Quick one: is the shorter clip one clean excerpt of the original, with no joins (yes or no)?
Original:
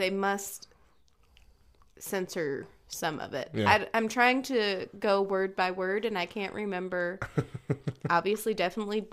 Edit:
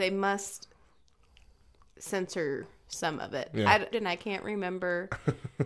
no